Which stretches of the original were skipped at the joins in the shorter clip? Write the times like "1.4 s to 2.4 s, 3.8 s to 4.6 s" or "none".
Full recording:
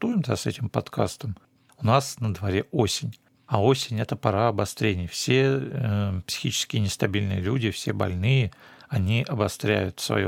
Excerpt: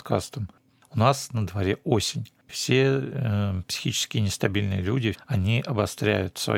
3.4 s to 5.1 s, 7.7 s to 8.8 s